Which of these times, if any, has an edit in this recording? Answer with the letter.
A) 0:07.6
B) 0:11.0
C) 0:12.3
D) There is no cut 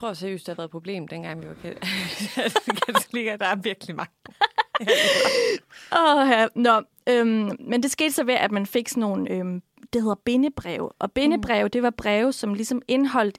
D